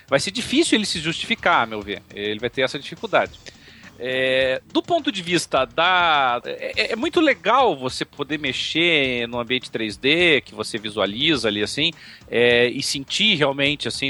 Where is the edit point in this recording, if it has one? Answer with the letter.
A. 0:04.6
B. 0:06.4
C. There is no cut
B